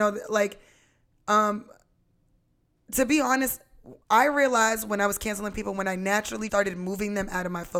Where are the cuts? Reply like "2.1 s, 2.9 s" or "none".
4.0 s, 6.5 s